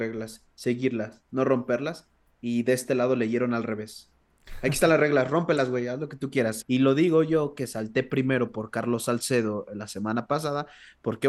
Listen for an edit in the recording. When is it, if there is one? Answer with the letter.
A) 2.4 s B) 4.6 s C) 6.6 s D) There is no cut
C